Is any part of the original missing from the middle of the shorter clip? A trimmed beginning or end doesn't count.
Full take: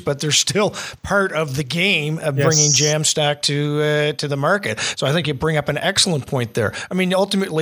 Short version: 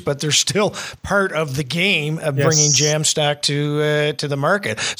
no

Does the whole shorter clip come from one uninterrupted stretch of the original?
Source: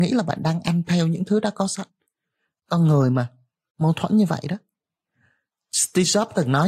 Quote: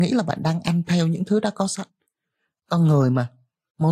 yes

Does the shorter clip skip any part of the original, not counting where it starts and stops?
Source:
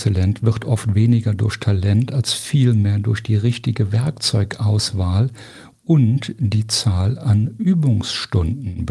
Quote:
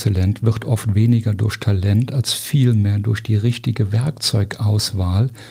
no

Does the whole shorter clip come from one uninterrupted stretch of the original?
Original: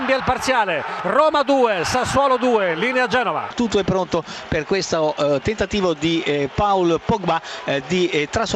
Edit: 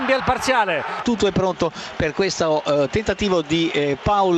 no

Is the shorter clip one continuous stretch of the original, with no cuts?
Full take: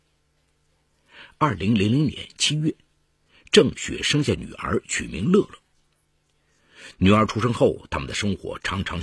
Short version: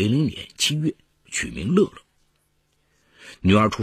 no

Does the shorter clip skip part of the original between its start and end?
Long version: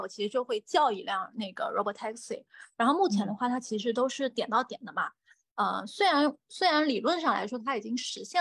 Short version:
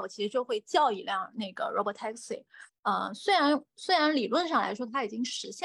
yes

